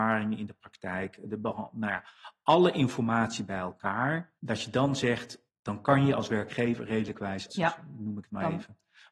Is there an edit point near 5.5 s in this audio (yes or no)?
yes